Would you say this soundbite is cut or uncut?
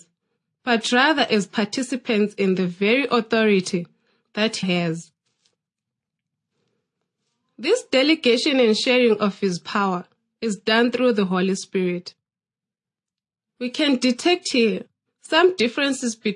cut